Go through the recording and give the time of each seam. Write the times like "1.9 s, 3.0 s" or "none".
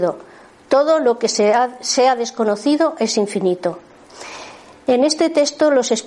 none